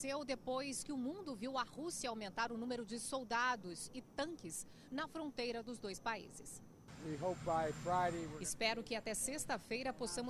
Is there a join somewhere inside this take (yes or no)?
no